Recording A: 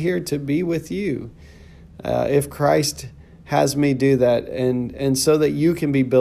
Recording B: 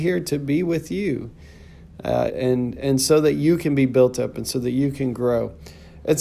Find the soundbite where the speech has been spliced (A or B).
B